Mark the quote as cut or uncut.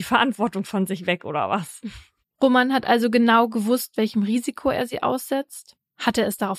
cut